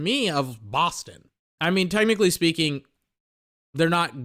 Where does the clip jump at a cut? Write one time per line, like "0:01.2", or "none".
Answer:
0:01.6

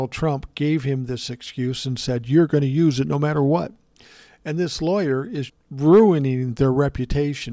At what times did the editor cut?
0:05.5

